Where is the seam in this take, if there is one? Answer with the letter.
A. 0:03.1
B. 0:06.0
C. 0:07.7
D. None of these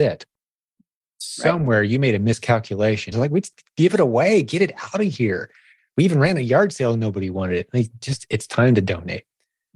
A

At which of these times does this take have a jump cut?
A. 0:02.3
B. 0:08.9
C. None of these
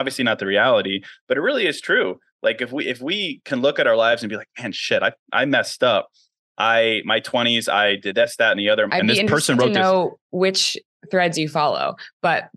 B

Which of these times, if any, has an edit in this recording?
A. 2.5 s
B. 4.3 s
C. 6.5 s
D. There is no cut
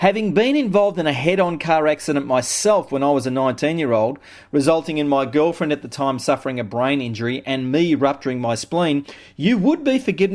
D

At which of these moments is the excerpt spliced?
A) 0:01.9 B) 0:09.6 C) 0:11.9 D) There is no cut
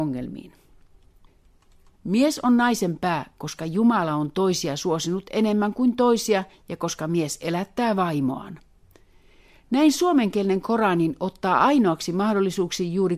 A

